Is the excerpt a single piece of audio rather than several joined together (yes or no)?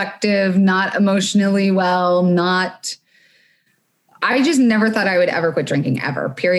yes